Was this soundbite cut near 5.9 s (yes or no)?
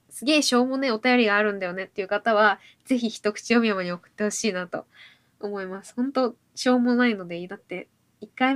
no